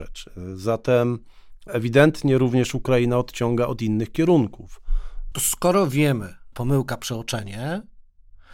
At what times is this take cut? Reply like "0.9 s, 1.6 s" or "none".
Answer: 5.3 s, 6.5 s